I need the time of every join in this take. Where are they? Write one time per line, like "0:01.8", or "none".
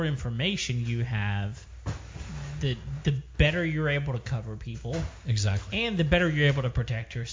none